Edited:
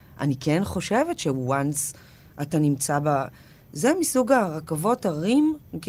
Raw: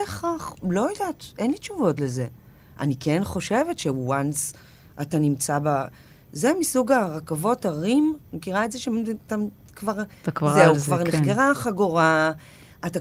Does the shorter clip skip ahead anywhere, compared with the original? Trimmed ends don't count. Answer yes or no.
no